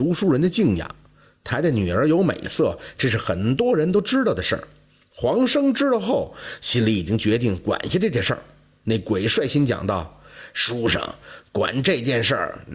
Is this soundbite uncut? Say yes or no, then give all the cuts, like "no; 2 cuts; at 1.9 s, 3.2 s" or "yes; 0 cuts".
yes; 0 cuts